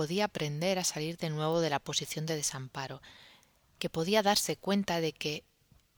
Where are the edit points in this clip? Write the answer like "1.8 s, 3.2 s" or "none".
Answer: none